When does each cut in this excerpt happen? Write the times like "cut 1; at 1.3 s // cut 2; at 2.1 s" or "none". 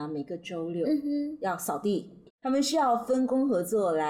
cut 1; at 2.3 s